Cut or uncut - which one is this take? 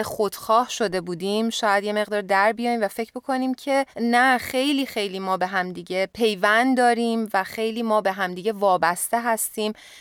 cut